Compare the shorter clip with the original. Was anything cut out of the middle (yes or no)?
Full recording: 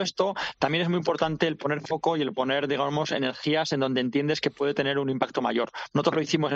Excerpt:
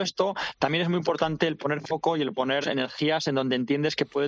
yes